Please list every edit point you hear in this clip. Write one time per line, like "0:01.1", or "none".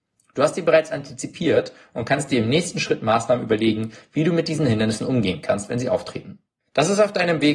0:06.6

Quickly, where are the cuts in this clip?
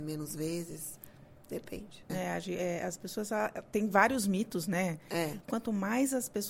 0:02.1
0:05.4

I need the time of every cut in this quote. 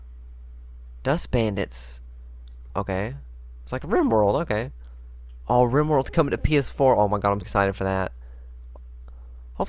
0:02.7
0:07.4

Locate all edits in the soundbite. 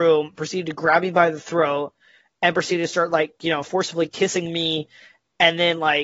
none

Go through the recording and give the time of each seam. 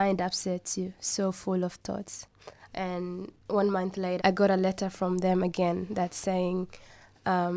0:02.7
0:04.2

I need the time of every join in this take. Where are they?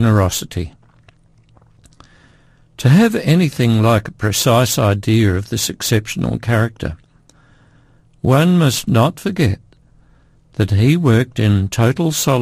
none

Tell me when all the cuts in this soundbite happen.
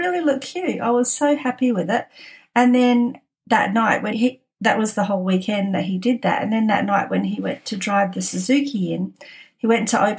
0:04.1

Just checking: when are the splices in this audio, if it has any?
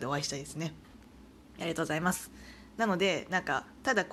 0:02.7

